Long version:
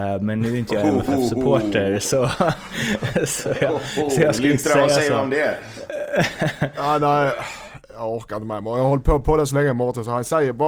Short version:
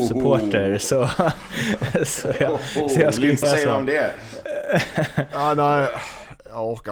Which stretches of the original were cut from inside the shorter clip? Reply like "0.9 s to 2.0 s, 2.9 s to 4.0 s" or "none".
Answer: 4.6 s to 4.9 s